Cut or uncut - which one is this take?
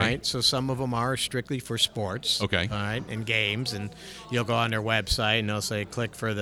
uncut